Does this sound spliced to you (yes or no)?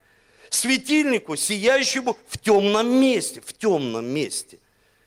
no